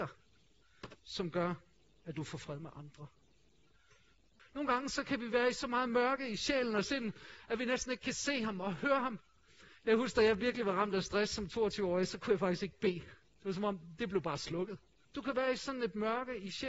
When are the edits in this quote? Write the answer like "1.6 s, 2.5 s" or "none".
4.4 s, 15.0 s